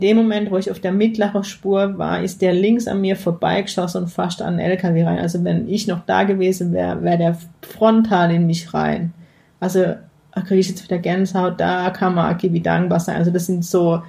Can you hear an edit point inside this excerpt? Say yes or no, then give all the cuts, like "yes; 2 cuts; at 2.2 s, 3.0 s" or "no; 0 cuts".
no; 0 cuts